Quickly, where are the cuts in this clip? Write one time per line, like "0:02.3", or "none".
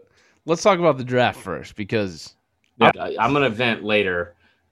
0:02.9